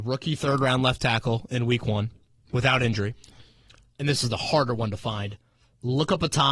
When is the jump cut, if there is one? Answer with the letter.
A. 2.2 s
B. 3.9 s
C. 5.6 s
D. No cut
B